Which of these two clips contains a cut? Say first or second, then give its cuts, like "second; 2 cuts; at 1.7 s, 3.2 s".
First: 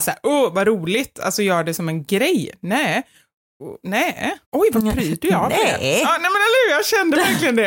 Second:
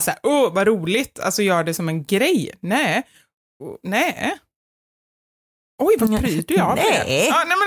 first; 1 cut; at 4.4 s